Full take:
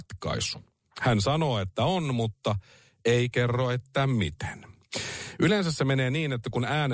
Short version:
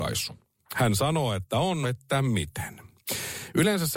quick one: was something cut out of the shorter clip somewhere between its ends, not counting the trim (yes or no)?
yes